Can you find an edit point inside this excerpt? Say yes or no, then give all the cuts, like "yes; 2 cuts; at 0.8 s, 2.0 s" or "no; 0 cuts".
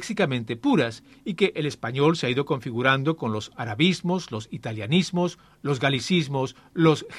no; 0 cuts